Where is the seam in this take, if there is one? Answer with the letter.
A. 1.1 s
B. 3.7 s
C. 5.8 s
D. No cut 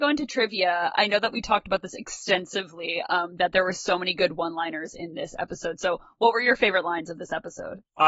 D